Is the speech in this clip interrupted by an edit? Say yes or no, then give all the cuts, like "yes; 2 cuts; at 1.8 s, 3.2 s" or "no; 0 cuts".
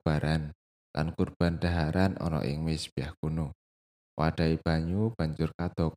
yes; 1 cut; at 4.0 s